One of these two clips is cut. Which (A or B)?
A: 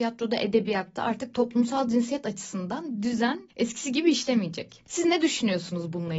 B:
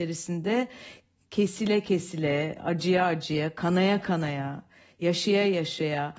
A